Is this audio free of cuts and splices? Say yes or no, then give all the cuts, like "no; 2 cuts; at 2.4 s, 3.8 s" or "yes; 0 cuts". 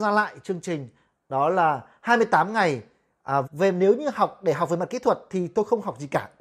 no; 1 cut; at 3.4 s